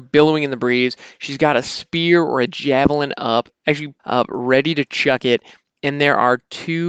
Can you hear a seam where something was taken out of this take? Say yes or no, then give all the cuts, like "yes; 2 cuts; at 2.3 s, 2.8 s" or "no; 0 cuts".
yes; 1 cut; at 4.0 s